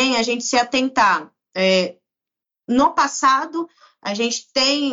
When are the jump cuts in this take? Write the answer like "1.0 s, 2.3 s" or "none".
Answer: none